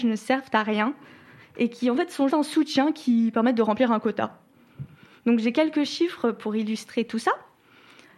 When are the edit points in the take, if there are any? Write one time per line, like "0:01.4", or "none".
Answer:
0:02.3